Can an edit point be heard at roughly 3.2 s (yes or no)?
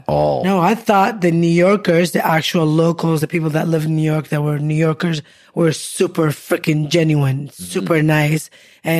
no